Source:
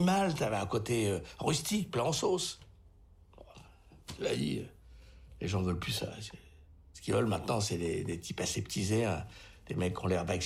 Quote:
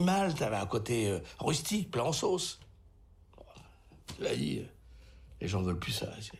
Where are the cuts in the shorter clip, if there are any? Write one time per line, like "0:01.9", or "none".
none